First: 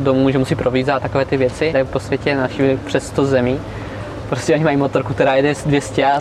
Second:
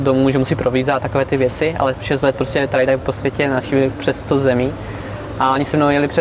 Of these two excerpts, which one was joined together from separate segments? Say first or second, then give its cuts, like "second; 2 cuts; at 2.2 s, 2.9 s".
first; 2 cuts; at 1.7 s, 4.2 s